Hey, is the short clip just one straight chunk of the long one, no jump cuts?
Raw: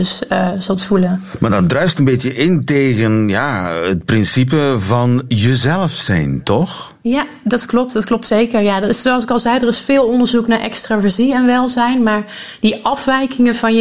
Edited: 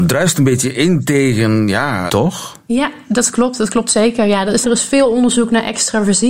no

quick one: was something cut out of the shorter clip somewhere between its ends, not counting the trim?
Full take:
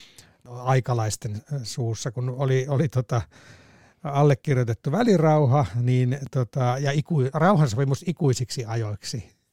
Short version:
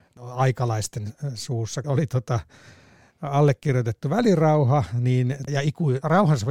yes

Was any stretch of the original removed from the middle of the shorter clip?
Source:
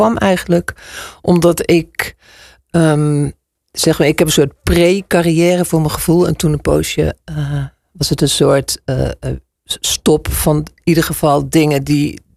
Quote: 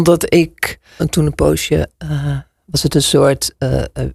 yes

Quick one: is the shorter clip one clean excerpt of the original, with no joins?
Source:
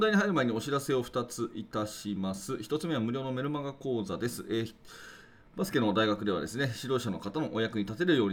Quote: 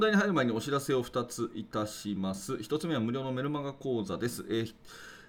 yes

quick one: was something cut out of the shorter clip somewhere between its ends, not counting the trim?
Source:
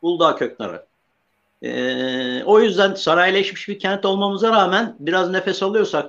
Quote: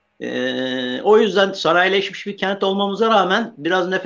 no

